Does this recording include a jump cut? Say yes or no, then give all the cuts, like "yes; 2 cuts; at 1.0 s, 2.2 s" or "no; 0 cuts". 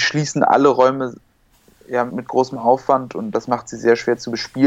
yes; 2 cuts; at 2.1 s, 3.3 s